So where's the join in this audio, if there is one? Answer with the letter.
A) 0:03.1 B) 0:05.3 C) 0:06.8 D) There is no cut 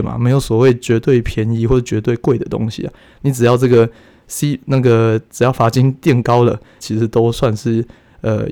C